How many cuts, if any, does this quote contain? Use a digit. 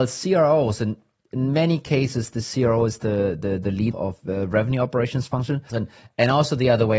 2